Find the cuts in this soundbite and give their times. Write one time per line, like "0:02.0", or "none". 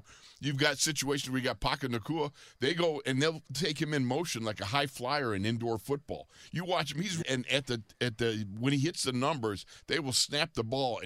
0:07.2